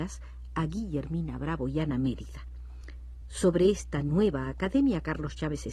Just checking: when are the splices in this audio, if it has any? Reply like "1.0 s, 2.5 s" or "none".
none